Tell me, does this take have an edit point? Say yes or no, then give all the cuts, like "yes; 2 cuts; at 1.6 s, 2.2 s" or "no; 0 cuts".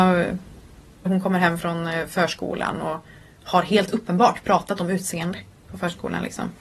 yes; 1 cut; at 1.1 s